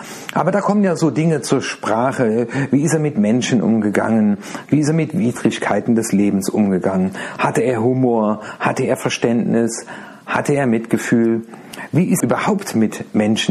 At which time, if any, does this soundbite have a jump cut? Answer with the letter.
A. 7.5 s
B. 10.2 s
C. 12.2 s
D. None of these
C